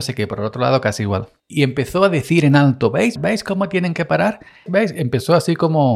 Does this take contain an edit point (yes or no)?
yes